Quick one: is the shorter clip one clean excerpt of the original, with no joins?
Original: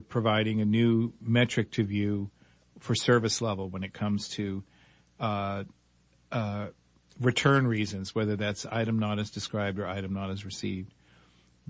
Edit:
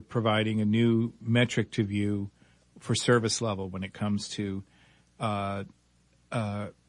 yes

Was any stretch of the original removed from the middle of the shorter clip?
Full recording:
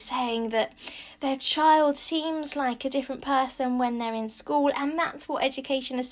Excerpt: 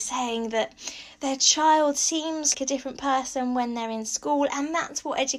yes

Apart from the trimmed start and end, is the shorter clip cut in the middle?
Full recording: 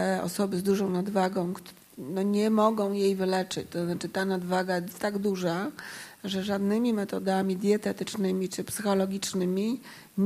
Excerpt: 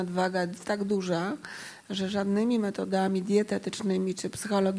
no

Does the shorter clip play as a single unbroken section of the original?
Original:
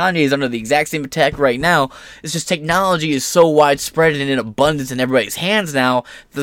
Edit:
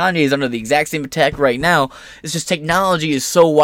yes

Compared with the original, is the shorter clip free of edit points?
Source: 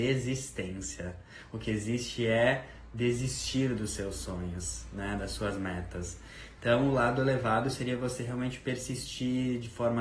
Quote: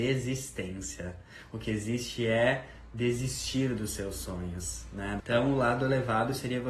no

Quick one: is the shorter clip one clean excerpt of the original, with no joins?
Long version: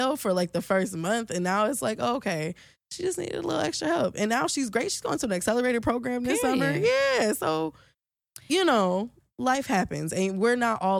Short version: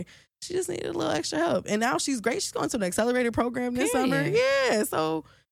yes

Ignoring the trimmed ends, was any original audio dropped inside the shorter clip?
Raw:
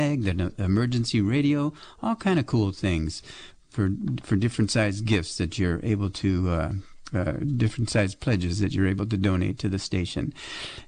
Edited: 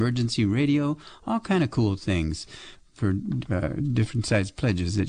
yes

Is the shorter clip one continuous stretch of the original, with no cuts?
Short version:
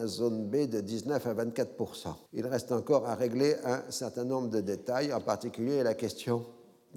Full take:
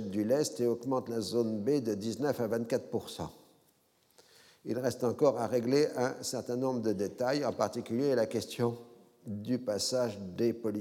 no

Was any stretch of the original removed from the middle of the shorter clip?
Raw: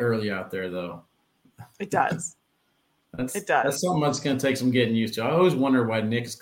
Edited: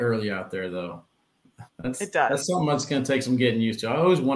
yes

